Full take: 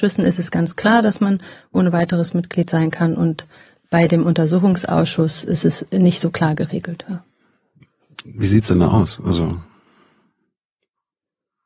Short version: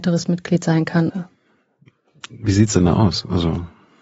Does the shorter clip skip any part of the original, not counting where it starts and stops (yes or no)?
yes